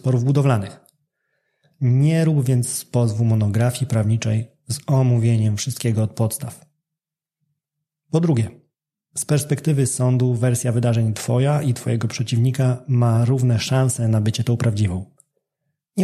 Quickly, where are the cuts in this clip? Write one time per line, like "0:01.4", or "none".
none